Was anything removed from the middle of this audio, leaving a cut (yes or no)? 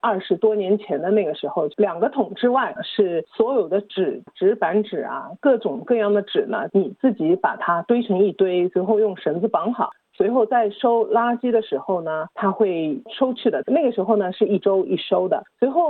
yes